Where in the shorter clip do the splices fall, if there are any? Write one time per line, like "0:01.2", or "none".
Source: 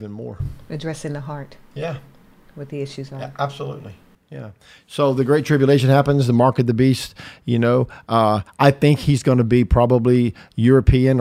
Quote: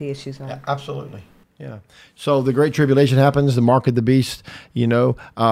none